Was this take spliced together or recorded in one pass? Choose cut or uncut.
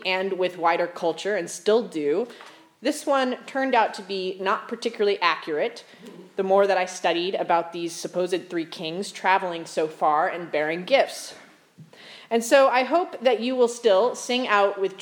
uncut